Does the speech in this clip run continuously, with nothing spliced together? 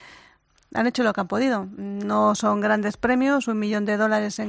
yes; 0 cuts

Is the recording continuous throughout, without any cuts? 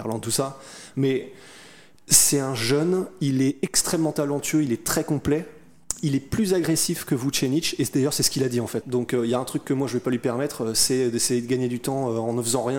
no; 1 cut; at 8.8 s

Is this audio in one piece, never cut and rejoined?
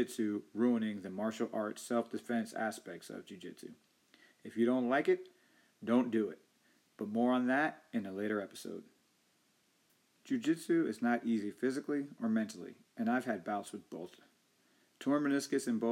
yes; 0 cuts

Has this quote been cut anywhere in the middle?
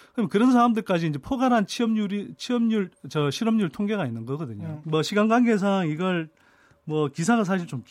yes; 1 cut; at 4.8 s

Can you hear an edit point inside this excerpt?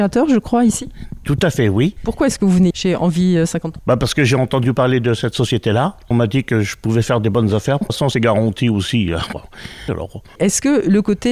yes; 2 cuts; at 7.8 s, 9.9 s

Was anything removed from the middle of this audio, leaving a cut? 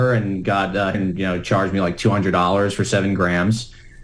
yes; 1 cut; at 0.9 s

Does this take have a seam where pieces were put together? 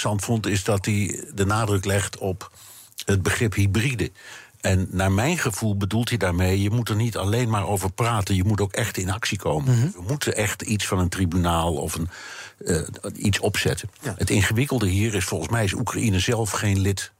no; 0 cuts

